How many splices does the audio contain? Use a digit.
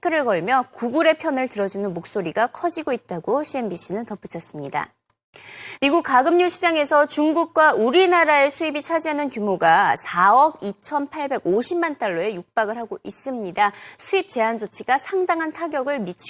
1